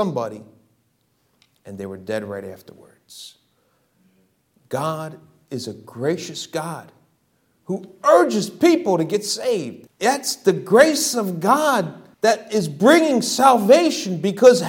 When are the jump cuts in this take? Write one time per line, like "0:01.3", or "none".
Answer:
0:09.9
0:12.1